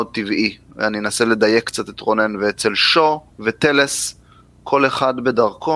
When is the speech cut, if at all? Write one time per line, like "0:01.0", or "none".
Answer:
0:03.3